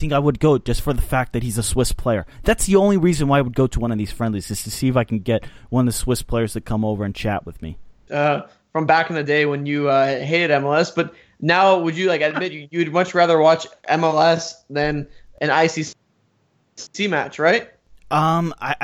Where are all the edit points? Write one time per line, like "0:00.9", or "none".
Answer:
0:08.1